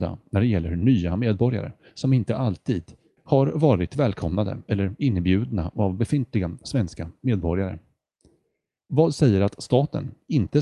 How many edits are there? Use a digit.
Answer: 1